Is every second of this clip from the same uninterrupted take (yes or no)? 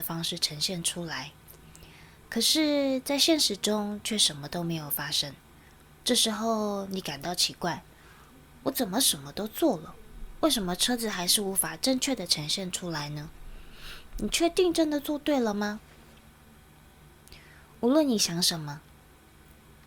yes